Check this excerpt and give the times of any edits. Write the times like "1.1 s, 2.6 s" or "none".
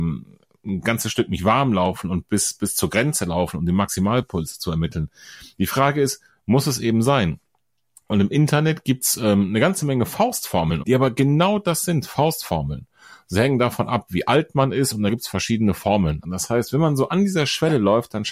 10.8 s, 16.2 s